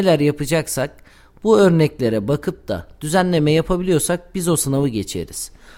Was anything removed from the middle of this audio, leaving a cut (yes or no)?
no